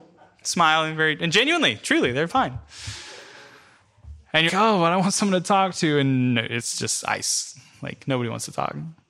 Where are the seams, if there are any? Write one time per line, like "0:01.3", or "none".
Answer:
0:02.3
0:04.5